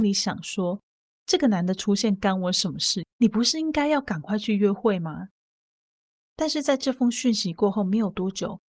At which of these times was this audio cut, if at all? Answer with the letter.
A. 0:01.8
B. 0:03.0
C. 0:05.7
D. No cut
B